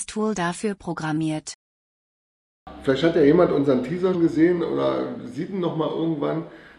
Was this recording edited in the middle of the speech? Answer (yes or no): yes